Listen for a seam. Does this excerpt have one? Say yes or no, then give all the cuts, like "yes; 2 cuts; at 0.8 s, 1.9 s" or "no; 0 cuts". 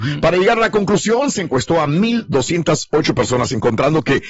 no; 0 cuts